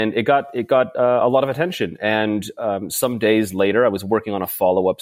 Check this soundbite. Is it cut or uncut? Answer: uncut